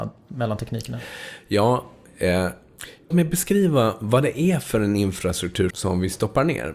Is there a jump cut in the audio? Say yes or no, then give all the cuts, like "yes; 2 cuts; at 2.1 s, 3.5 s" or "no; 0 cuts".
yes; 2 cuts; at 3.1 s, 5.7 s